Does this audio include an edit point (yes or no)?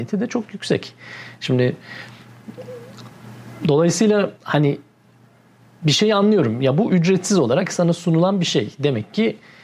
yes